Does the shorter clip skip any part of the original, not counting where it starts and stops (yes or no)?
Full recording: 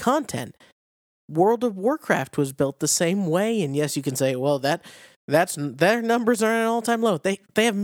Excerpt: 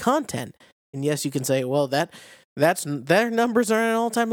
yes